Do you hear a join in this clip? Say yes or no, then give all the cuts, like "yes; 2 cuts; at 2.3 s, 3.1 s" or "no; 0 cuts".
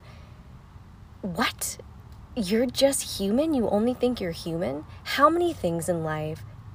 no; 0 cuts